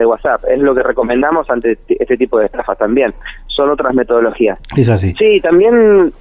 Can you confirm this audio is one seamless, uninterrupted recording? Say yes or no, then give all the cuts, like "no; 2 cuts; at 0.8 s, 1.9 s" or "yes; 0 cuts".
no; 1 cut; at 4.7 s